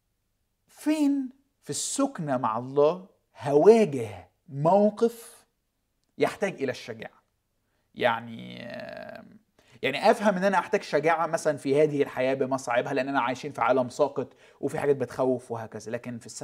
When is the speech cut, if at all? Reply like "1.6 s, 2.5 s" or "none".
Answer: none